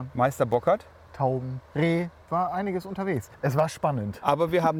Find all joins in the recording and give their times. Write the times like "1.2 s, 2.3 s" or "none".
1.7 s

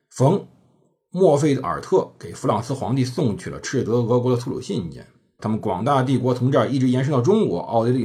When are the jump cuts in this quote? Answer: 5.4 s

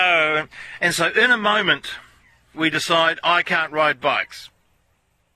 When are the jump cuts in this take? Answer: 2.5 s

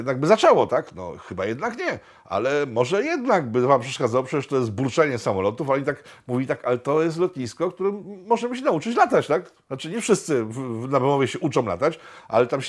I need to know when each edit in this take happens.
none

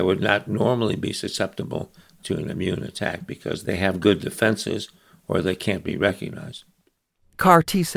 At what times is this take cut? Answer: none

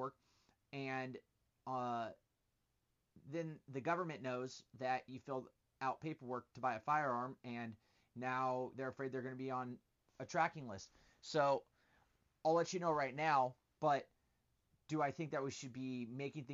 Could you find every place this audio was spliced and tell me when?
8.7 s, 13.8 s

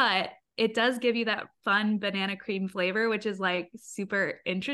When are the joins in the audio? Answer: none

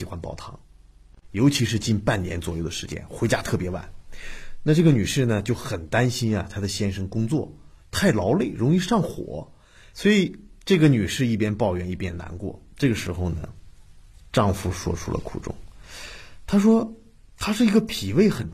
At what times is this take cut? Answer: 1.1 s, 9.9 s

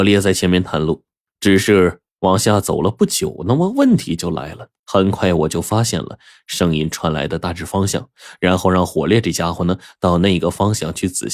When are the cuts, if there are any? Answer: 1.3 s, 4.8 s

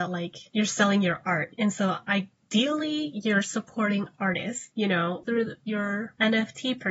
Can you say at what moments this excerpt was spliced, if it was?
none

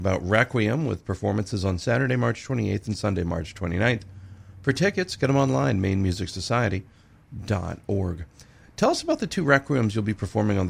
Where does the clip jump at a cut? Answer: none

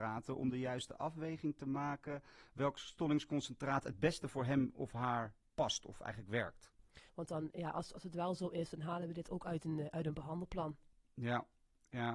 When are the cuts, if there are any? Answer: 7.1 s

